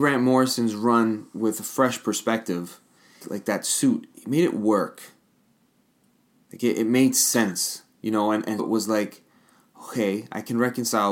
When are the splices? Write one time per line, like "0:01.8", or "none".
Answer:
0:03.2
0:08.6